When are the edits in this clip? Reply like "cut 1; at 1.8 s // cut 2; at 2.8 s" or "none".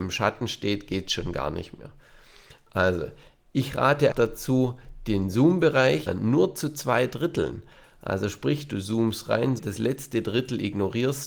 cut 1; at 4.1 s // cut 2; at 6.1 s // cut 3; at 9.6 s